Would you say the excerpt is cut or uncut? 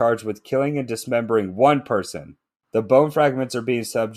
cut